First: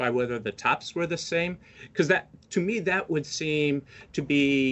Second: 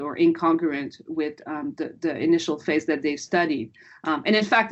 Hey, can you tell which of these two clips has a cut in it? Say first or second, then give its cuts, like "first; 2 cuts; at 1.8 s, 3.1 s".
second; 1 cut; at 2.0 s